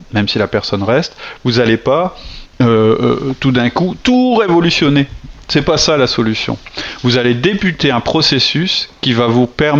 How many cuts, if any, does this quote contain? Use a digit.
1